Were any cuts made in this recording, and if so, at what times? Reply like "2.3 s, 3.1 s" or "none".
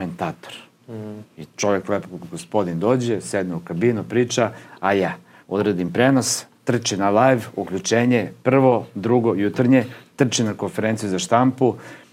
5.4 s

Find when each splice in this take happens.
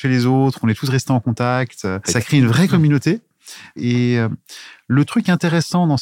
2.0 s, 3.8 s

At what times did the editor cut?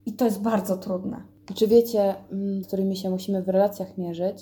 2.6 s

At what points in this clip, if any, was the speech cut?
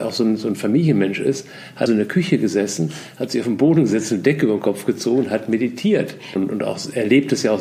1.9 s, 6.4 s

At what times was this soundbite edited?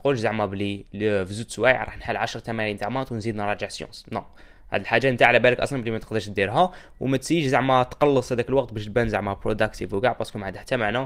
none

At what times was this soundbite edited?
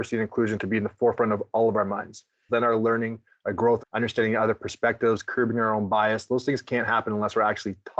2.5 s, 3.8 s

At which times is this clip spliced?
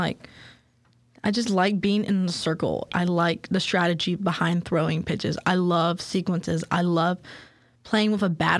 2.9 s

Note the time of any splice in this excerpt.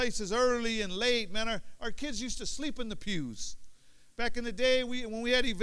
none

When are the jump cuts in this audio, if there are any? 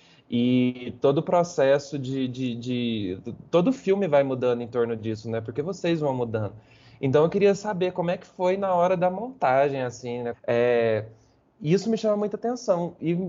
10.3 s

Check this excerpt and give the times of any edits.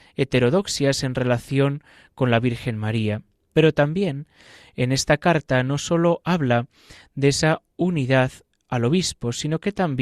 3.5 s

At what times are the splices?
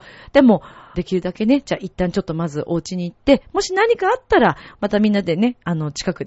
0.9 s, 4.7 s

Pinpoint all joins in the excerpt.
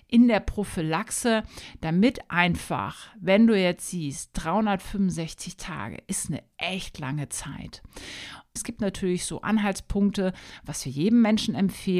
8.6 s

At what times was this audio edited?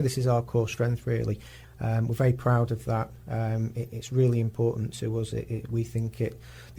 1.6 s

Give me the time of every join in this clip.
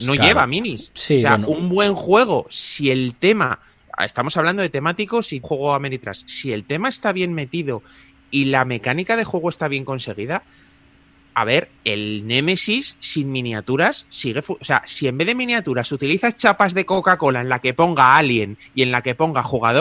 5.4 s

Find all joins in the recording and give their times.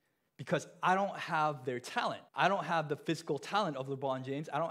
2.3 s

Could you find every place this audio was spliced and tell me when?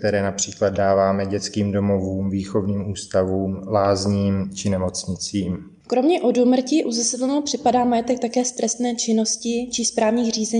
none

